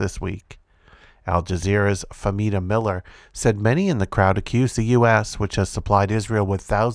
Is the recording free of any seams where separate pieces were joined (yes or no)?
yes